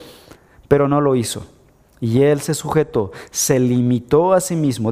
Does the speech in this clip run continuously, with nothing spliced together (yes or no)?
yes